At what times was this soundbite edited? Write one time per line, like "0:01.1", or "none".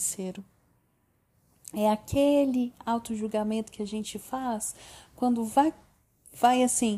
none